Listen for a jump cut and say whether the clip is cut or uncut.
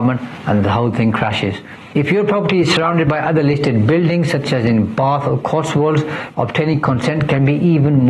cut